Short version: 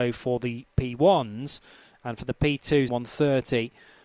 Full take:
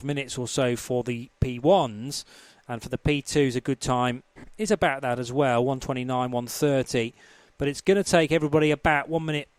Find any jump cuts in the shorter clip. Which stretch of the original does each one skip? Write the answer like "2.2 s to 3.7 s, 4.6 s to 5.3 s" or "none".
3.5 s to 6.3 s